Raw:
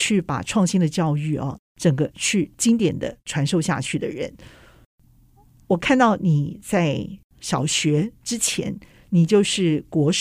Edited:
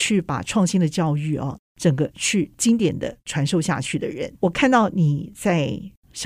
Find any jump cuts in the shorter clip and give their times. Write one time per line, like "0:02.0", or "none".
0:04.4